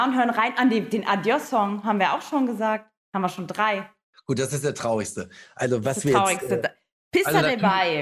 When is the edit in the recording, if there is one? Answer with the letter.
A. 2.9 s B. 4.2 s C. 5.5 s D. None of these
D